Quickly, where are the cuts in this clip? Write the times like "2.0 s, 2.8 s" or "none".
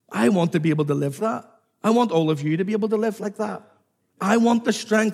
1.2 s